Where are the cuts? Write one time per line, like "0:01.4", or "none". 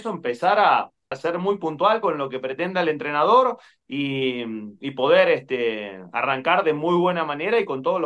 0:01.1